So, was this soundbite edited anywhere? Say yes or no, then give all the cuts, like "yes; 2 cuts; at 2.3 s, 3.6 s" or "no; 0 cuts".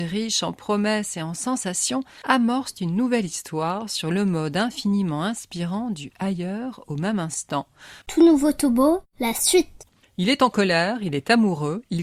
yes; 1 cut; at 8.0 s